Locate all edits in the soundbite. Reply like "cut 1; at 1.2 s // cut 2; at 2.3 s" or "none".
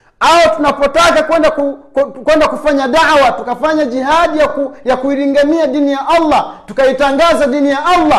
none